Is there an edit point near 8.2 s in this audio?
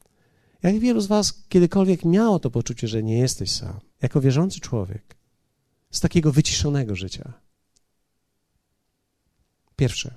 no; 2 cuts; at 3.9 s, 5.8 s

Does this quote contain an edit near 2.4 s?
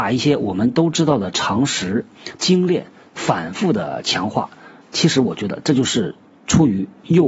yes; 2 cuts; at 2.4 s, 4.8 s

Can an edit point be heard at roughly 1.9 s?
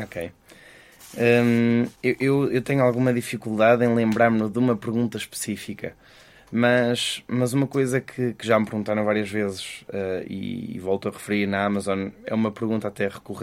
yes; 1 cut; at 1.9 s

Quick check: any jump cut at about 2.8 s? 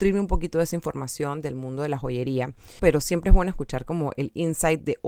yes; 1 cut; at 2.8 s

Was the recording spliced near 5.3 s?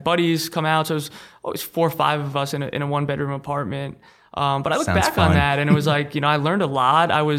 no; 0 cuts

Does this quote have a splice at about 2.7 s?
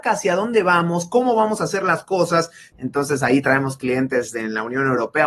yes; 1 cut; at 2.7 s

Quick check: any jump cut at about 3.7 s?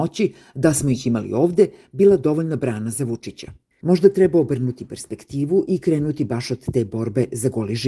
yes; 1 cut; at 3.7 s

